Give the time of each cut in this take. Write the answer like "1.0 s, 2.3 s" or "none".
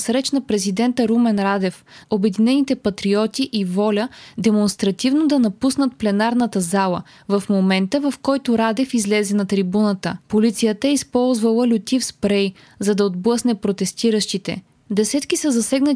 2.0 s, 10.2 s

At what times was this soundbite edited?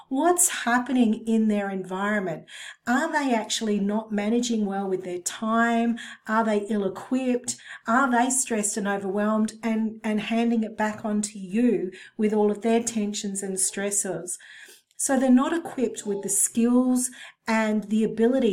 7.8 s, 14.9 s

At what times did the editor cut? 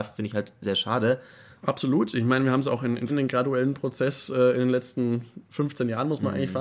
1.6 s, 3.1 s

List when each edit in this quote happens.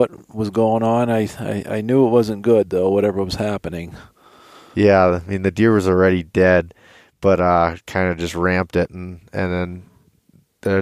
none

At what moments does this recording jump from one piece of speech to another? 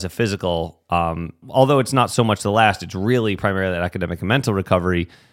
1.4 s

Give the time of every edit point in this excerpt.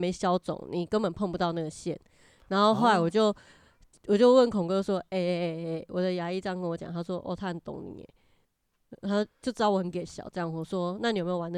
none

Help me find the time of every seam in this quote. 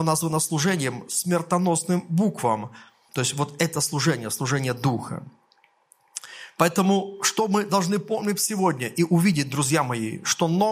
3.1 s

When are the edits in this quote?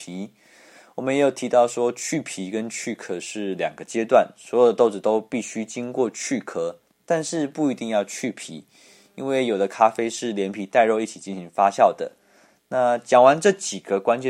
none

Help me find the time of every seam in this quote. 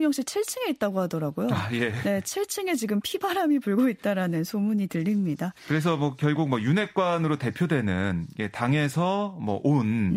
none

